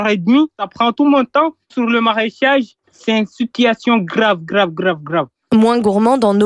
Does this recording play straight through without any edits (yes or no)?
no